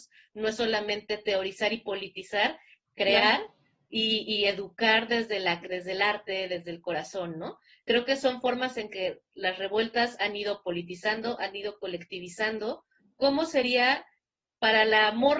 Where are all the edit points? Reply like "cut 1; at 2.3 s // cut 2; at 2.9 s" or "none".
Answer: cut 1; at 2.9 s